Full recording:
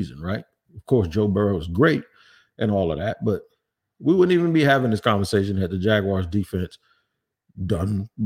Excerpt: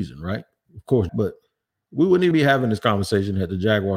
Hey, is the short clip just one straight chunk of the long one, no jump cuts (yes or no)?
no